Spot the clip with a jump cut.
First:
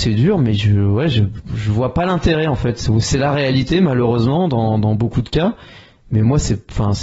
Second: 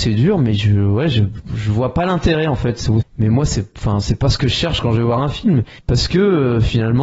second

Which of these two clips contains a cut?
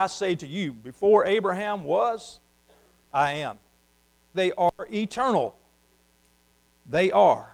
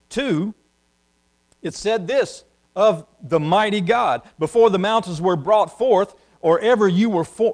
first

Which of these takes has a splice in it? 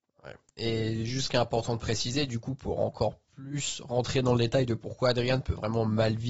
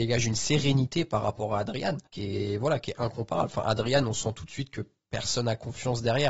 second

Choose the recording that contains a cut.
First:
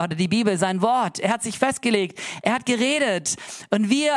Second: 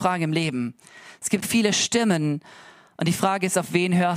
second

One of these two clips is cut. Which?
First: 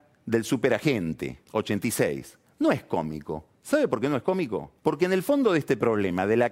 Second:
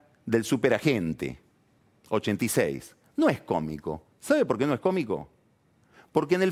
first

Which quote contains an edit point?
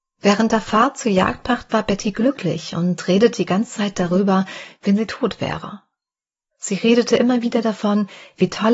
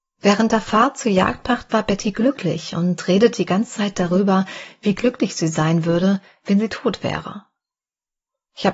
first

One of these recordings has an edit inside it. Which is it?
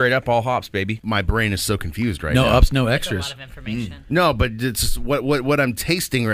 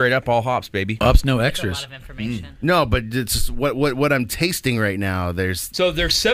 second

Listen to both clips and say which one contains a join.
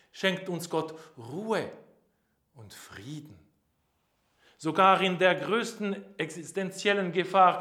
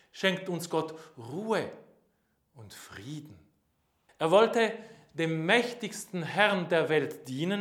second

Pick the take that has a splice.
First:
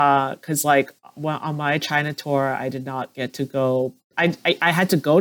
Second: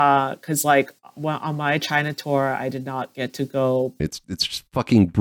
second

